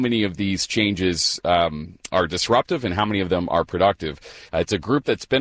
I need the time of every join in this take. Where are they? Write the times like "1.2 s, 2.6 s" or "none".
4.5 s